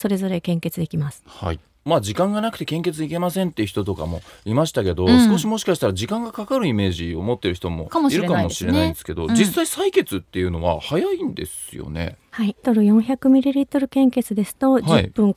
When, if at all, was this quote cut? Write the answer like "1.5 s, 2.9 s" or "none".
12.6 s